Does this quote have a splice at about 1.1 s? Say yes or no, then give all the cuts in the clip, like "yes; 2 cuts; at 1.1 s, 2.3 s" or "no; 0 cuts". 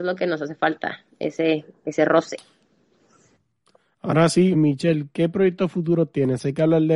no; 1 cut; at 4.5 s